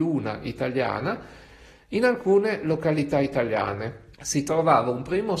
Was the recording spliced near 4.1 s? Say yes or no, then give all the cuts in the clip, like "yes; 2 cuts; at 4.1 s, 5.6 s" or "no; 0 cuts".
yes; 1 cut; at 4.1 s